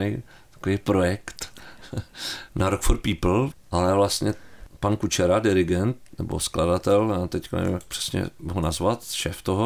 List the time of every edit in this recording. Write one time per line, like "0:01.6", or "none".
0:03.5